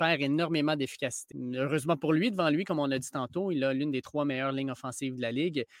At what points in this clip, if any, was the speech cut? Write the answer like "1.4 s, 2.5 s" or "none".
none